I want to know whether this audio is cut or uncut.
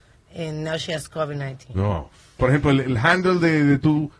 cut